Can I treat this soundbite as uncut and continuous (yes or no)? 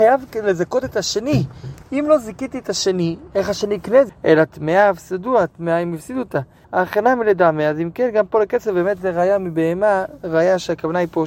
no